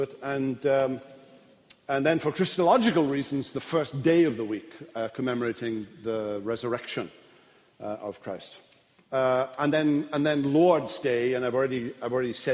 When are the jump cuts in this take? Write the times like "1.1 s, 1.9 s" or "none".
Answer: 9.0 s